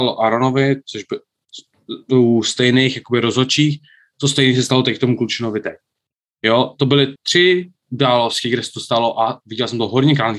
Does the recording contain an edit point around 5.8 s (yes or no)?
no